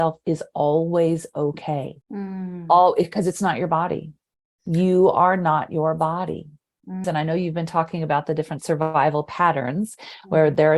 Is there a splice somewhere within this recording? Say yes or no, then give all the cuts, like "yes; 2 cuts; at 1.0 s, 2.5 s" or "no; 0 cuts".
yes; 2 cuts; at 2.0 s, 7.0 s